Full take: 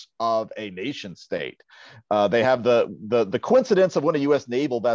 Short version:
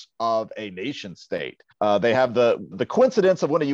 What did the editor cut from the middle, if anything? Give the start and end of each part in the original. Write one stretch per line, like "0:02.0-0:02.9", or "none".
0:01.7-0:02.0
0:03.0-0:03.2